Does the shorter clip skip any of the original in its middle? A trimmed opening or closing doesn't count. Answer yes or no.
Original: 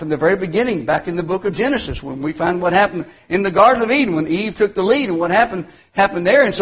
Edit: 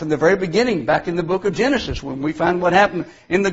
no